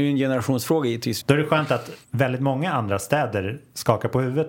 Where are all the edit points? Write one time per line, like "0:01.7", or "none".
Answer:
0:01.2